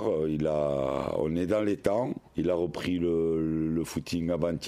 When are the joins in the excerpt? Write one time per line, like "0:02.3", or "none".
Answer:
0:02.3